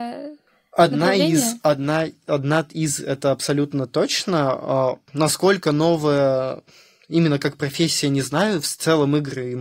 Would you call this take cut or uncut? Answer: uncut